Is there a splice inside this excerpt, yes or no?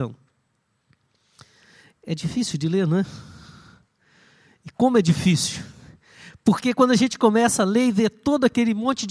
no